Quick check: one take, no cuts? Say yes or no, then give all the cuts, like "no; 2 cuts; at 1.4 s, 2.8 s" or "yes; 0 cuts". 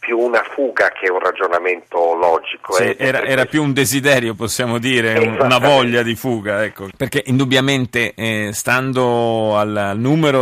no; 1 cut; at 6.9 s